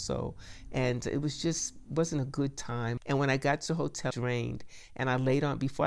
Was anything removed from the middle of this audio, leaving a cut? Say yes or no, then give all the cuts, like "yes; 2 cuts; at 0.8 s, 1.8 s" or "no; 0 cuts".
yes; 2 cuts; at 3.0 s, 4.1 s